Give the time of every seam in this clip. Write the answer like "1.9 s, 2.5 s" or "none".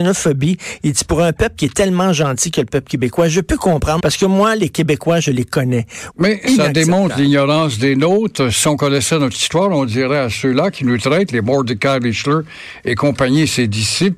4.0 s, 6.1 s